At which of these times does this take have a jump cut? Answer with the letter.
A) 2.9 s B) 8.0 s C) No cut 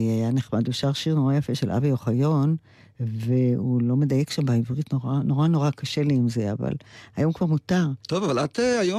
B